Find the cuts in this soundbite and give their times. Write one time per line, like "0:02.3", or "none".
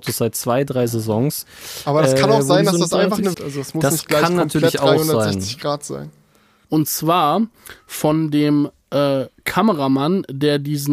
0:03.3
0:06.6